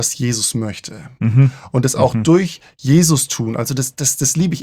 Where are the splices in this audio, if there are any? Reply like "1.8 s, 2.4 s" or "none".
none

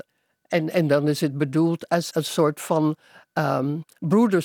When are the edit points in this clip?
2.1 s

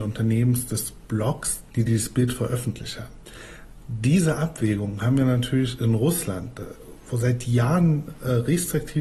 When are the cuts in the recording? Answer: none

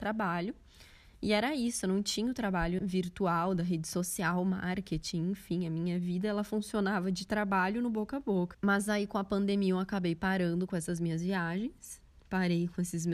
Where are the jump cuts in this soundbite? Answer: 2.8 s, 8.5 s

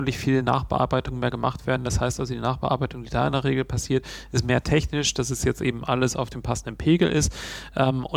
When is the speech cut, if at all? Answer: none

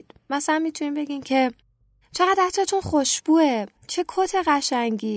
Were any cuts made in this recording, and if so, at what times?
3.8 s

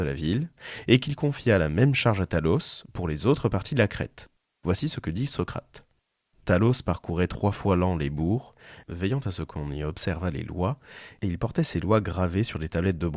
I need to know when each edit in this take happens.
none

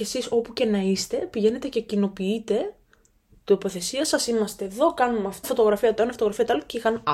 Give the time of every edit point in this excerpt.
5.4 s

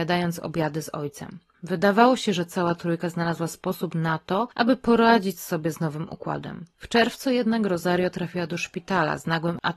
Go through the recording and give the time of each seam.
none

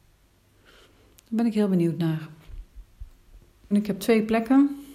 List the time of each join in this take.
3.7 s

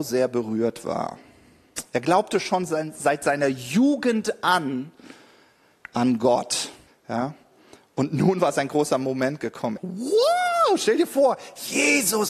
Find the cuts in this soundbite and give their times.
6.9 s, 9.8 s

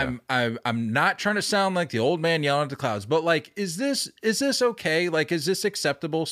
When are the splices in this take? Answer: none

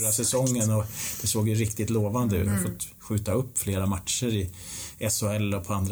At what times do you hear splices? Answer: 2.4 s

